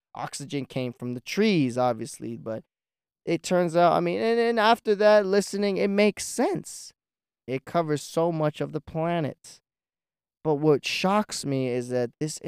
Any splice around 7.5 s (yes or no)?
yes